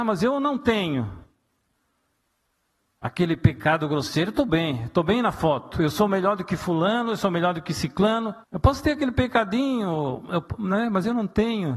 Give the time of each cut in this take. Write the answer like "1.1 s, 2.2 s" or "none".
8.4 s